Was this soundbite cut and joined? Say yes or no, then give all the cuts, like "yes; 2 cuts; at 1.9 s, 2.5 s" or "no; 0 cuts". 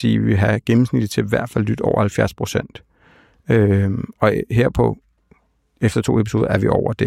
no; 0 cuts